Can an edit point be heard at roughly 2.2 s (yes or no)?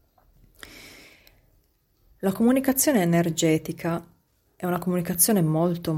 yes